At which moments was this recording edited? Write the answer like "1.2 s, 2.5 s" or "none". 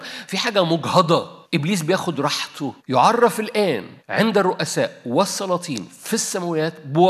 1.4 s, 2.8 s, 4.0 s